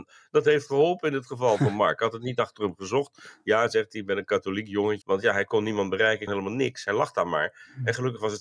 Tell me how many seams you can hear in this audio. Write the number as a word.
two